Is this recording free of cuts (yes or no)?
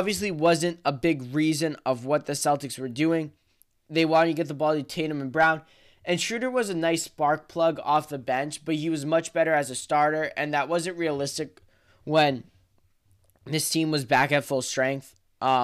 yes